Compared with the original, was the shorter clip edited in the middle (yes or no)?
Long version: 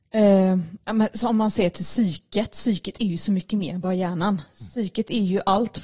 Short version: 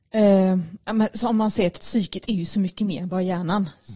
yes